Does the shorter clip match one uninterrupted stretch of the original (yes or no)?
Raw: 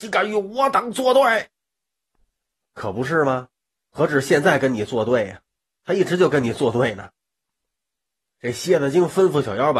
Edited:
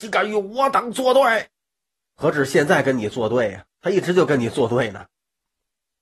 no